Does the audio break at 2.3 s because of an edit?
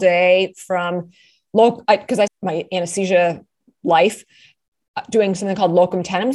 yes; 1 cut; at 2.3 s

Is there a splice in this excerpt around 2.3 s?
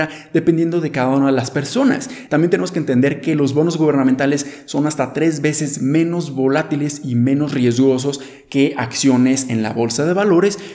yes; 1 cut; at 2.3 s

